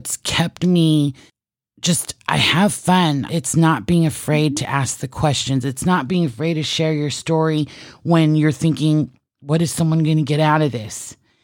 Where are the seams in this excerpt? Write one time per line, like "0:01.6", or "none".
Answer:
0:03.3